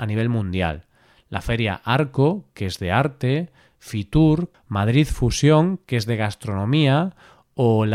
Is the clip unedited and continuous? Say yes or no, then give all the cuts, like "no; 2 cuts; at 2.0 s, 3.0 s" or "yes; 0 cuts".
no; 1 cut; at 4.5 s